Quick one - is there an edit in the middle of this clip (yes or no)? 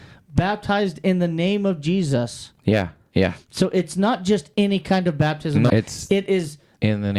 yes